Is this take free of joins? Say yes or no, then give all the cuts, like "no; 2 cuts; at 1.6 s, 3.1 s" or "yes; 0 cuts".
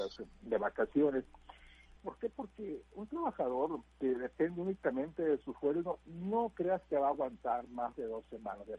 no; 2 cuts; at 2.0 s, 3.9 s